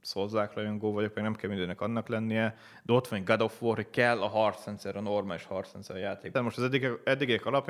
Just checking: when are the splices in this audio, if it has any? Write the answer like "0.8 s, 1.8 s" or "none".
6.3 s